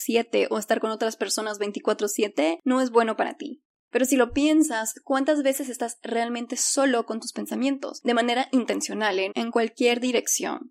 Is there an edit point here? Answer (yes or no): yes